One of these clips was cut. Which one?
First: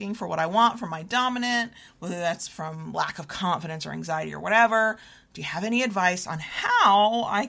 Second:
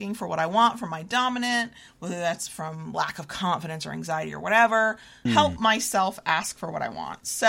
second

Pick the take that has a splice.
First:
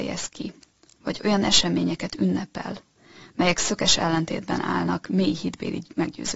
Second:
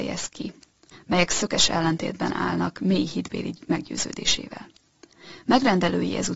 second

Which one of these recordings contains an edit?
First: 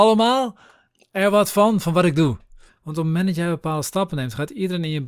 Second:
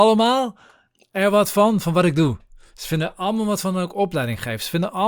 first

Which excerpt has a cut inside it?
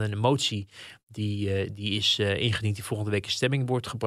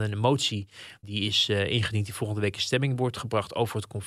second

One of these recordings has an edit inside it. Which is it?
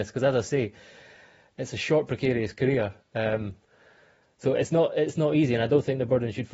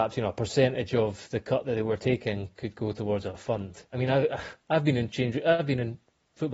second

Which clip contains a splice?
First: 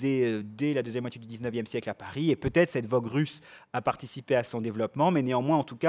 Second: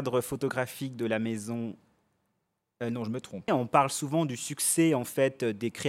second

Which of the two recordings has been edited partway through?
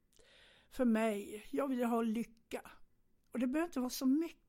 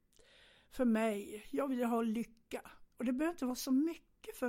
second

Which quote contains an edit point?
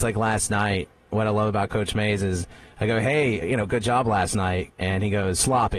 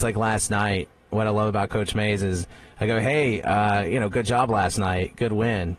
first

